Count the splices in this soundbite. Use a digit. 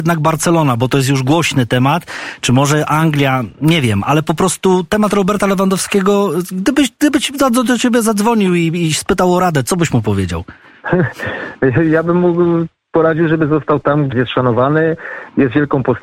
1